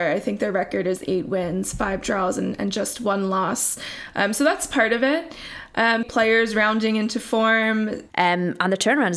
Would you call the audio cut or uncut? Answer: cut